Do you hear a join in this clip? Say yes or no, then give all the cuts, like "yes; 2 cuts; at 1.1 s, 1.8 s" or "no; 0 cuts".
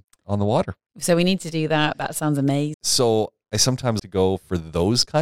yes; 2 cuts; at 2.7 s, 4.0 s